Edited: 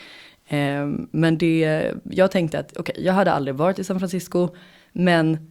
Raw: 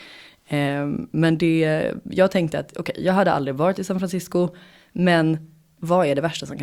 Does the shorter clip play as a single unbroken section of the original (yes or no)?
yes